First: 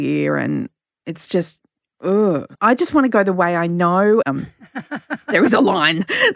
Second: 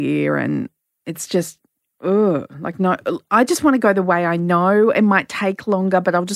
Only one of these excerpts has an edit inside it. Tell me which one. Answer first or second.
first